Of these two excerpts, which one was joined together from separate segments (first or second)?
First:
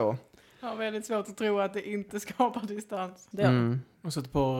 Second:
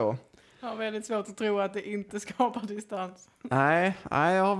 first